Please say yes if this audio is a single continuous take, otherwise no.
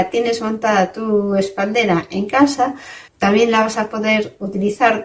no